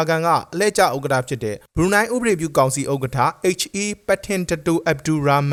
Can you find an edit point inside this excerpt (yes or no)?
yes